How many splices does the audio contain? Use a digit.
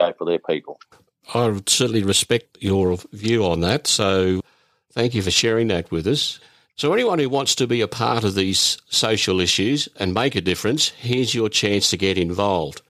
0